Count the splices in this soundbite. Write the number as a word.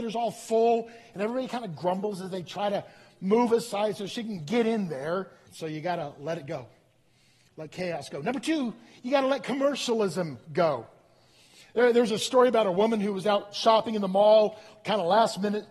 one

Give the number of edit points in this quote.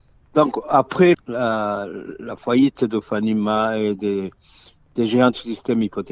one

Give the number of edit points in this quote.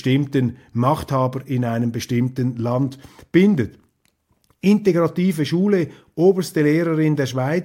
zero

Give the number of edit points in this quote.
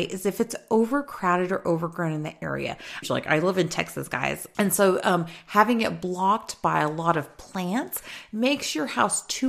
two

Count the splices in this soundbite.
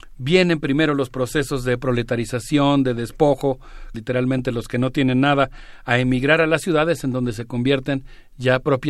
one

